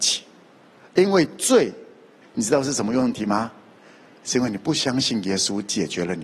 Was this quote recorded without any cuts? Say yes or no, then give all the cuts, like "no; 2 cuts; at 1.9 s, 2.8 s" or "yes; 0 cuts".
no; 1 cut; at 2.2 s